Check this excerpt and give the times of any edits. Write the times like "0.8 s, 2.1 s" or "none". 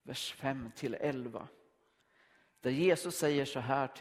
none